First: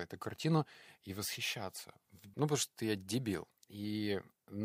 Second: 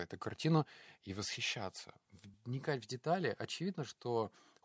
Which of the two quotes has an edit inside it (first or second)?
first